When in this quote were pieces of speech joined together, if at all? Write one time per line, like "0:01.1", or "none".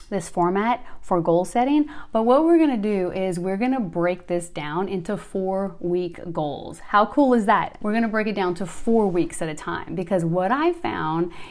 0:07.8